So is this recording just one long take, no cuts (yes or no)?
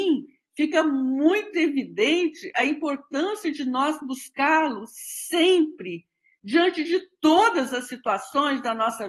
yes